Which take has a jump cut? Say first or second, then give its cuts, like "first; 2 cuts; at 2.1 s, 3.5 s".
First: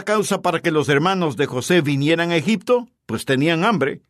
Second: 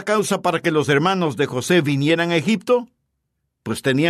first; 1 cut; at 3.0 s